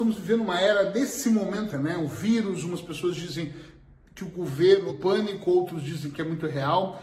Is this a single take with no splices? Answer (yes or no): no